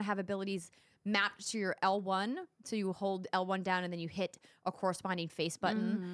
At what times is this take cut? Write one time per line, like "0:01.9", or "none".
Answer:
none